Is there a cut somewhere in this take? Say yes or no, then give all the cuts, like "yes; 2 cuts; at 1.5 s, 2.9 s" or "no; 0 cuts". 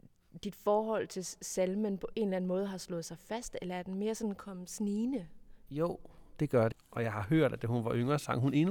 yes; 2 cuts; at 5.7 s, 6.7 s